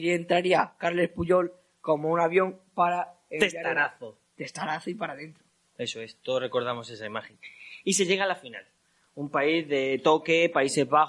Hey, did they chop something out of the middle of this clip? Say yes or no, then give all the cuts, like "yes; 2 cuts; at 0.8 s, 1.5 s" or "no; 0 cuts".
no; 0 cuts